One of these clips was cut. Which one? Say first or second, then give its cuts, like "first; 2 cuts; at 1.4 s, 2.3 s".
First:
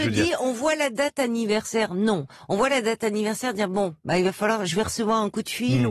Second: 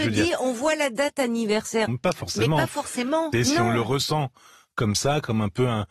second; 2 cuts; at 1.9 s, 3.3 s